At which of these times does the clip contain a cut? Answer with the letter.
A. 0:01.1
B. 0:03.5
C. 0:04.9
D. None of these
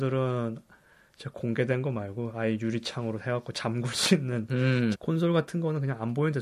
C